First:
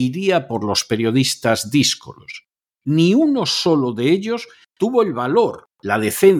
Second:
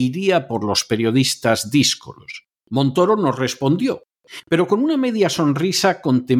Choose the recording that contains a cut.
second; 1 cut; at 2.6 s

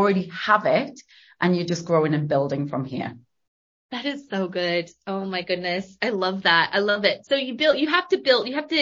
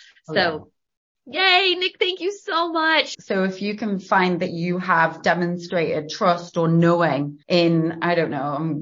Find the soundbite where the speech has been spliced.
second; 2 cuts; at 3.1 s, 7.4 s

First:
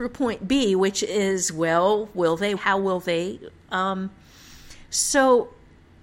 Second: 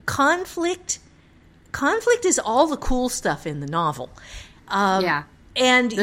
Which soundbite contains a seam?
first; 1 cut; at 2.6 s

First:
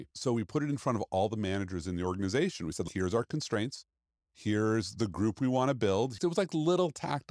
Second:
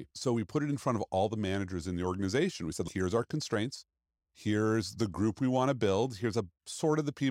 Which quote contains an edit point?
first; 1 cut; at 6.2 s

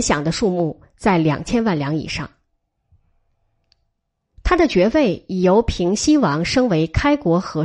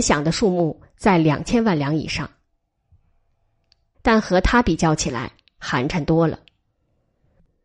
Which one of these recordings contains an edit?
second; 1 cut; at 3.9 s

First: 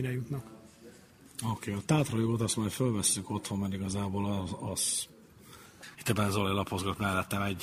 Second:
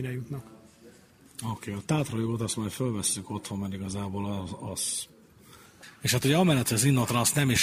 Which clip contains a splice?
first; 1 cut; at 5.9 s

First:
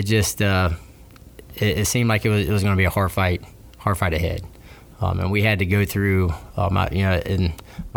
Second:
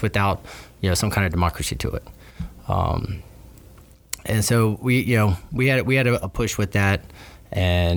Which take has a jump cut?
second; 1 cut; at 6.2 s

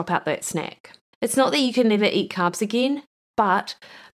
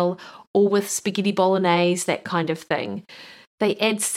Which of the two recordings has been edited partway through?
first; 1 cut; at 1.1 s

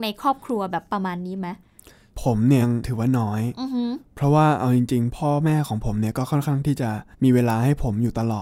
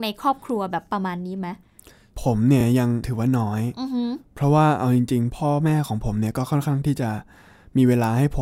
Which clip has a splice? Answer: first; 2 cuts; at 2.6 s, 7.1 s

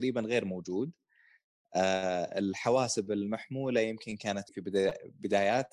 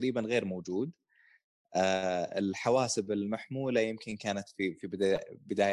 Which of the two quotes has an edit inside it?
first; 1 cut; at 4.5 s

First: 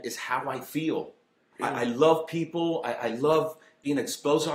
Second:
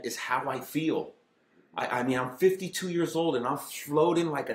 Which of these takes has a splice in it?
first; 1 cut; at 1.5 s

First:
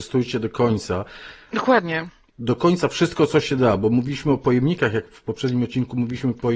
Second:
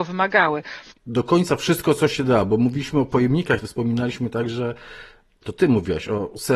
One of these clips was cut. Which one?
second; 2 cuts; at 0.9 s, 3.6 s

